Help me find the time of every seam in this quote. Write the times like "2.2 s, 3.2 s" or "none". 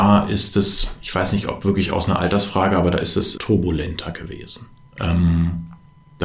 3.4 s